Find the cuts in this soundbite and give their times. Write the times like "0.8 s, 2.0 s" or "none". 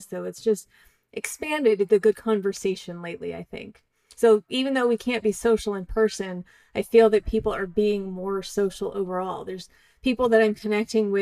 none